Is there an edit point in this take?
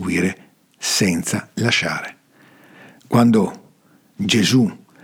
no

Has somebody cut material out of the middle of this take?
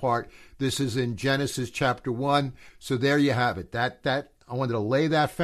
yes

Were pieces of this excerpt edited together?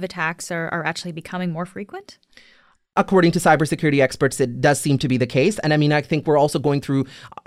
no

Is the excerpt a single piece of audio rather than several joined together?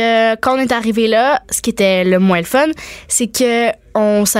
yes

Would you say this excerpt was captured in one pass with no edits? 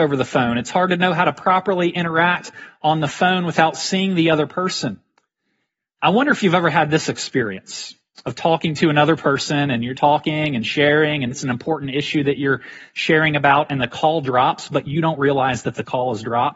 no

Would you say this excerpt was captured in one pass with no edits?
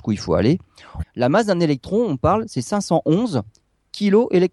no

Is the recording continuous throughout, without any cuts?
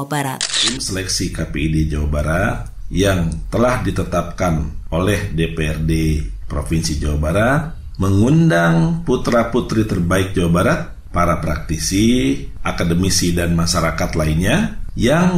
yes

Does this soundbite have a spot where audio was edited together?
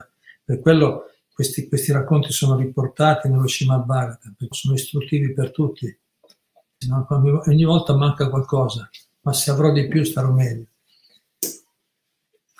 yes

